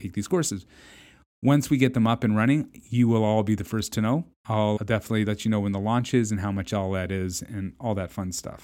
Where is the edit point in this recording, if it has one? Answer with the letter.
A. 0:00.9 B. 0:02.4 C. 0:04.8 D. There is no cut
C